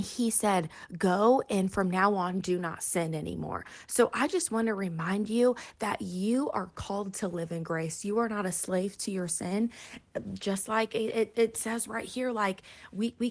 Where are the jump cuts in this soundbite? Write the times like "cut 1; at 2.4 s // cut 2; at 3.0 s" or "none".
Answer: none